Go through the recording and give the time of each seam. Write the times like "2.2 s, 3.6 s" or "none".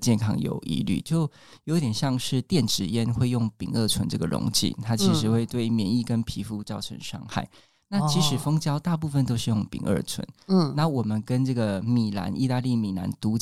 none